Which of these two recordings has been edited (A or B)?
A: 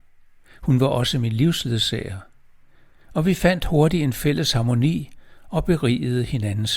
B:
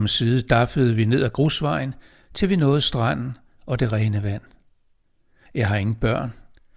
B